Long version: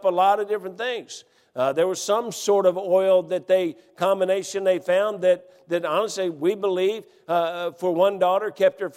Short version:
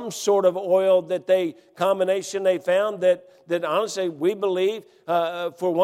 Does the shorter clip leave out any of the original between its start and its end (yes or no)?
no